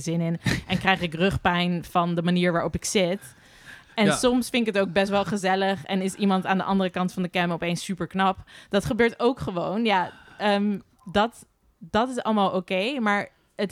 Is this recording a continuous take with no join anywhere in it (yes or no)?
yes